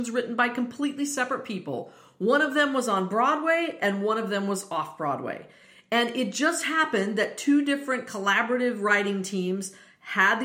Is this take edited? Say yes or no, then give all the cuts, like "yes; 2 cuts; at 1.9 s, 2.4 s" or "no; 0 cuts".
no; 0 cuts